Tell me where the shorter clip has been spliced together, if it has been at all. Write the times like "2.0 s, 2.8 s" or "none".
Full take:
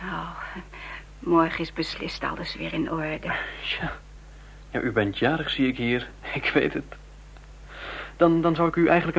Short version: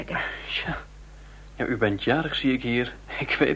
none